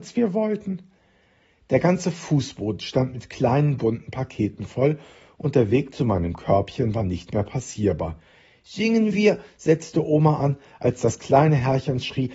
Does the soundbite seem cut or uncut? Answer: uncut